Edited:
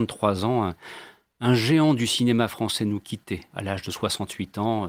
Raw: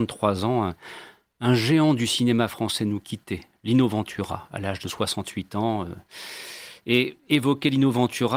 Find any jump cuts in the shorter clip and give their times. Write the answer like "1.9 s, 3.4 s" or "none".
3.5 s